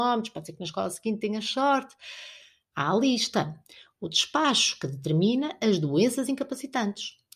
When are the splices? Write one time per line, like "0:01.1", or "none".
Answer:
0:02.7